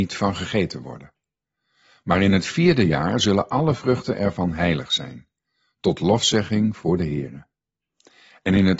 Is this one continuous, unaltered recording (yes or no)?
yes